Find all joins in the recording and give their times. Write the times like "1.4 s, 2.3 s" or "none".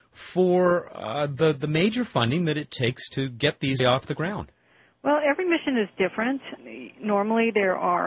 3.8 s